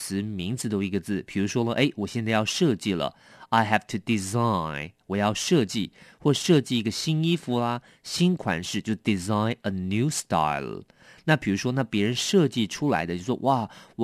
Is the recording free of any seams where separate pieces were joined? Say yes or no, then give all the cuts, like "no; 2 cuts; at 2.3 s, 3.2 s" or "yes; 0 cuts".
yes; 0 cuts